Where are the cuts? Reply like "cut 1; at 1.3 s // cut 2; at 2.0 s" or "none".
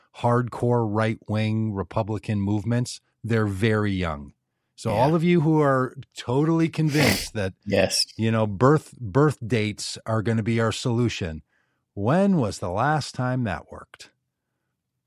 none